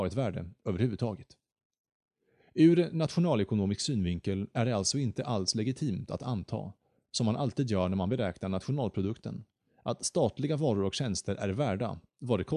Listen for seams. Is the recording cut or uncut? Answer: uncut